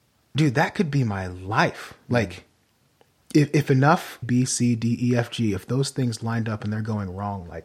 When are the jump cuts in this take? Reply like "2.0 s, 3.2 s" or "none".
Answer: 4.2 s